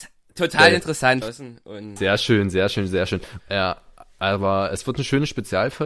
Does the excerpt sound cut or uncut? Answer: cut